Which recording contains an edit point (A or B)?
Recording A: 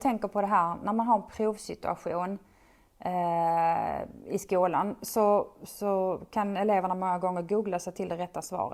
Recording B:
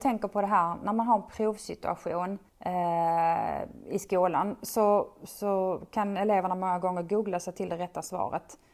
B